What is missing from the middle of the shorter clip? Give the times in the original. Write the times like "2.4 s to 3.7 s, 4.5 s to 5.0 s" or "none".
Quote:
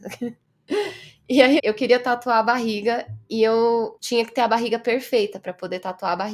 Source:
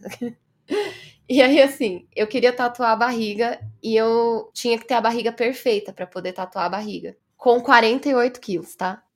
1.6 s to 2.1 s